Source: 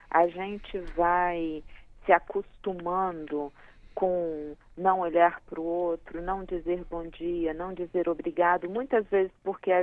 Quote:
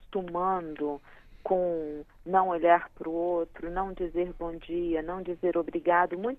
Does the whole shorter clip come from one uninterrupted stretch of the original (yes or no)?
yes